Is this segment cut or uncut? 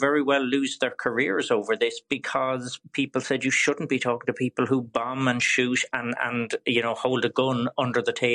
uncut